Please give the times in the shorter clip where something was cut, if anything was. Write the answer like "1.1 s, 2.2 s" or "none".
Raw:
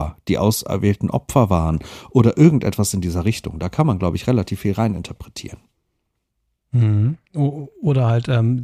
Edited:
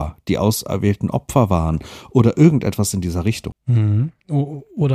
3.5 s